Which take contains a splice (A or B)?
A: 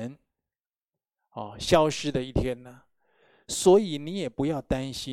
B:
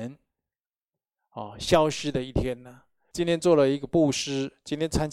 B